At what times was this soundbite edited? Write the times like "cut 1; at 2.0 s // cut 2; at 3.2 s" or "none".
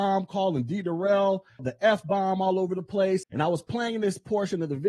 cut 1; at 1.6 s // cut 2; at 3.2 s